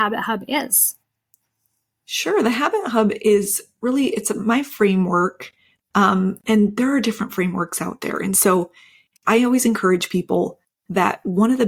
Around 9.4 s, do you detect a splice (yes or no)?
no